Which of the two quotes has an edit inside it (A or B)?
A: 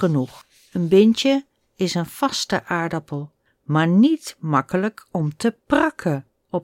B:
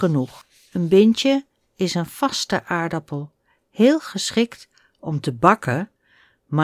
A